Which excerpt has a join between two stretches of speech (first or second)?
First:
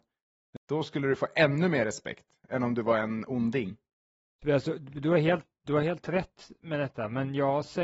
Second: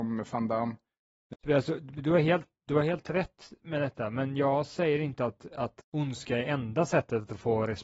second